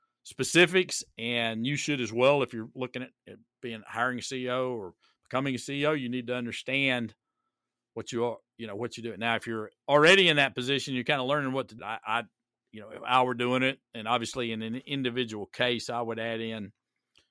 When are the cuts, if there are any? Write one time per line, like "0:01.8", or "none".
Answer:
0:11.8